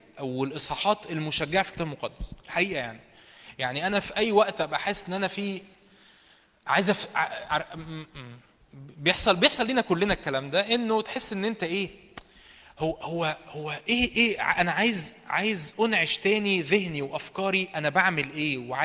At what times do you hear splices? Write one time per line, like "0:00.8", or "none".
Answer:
none